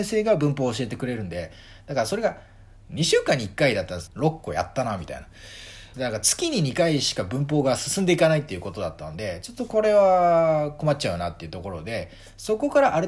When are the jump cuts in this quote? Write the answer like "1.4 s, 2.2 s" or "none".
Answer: 4.1 s, 5.9 s